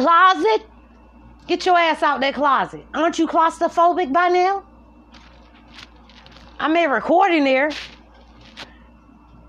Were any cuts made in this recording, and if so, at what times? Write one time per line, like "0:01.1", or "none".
none